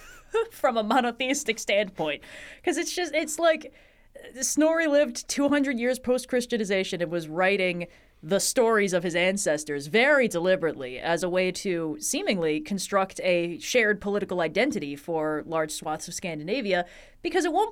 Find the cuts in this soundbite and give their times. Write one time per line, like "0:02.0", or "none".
none